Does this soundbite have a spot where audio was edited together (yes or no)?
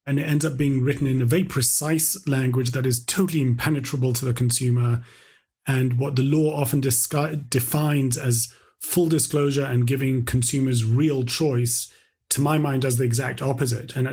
no